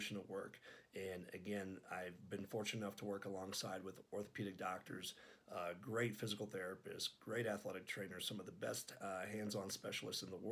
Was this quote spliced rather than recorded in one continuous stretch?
no; 0 cuts

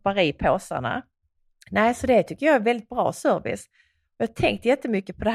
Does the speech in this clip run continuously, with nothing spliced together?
yes; 0 cuts

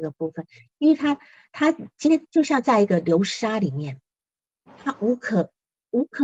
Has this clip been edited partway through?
no; 0 cuts

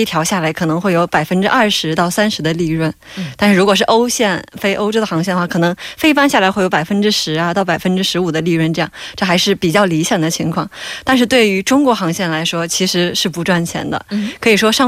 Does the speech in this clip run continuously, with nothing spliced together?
yes; 0 cuts

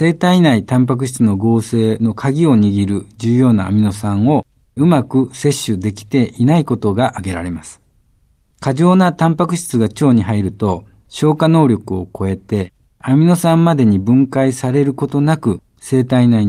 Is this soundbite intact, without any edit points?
yes; 0 cuts

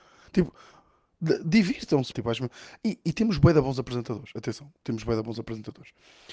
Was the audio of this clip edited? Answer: yes; 1 cut; at 2.1 s

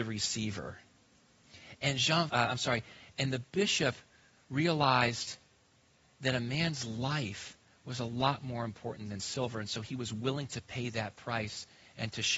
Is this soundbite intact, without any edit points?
no; 1 cut; at 2.3 s

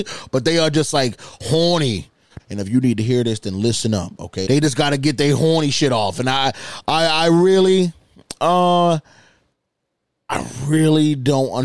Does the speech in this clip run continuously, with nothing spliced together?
no; 2 cuts; at 2.4 s, 4.5 s

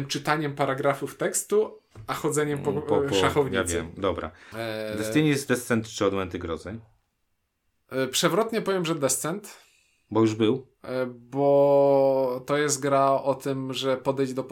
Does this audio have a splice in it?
yes; 1 cut; at 4.5 s

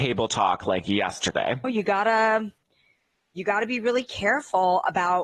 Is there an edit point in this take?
yes; 1 cut; at 1.6 s

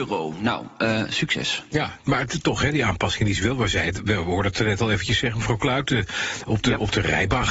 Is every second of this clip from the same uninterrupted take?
yes; 0 cuts

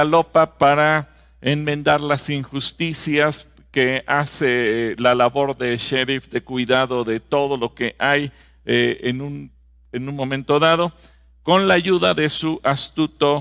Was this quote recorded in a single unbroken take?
yes; 0 cuts

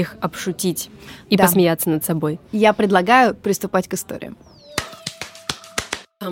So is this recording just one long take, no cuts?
yes; 0 cuts

